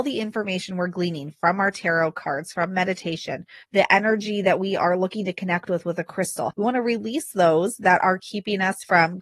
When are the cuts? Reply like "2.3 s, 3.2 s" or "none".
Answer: 3.6 s, 6.5 s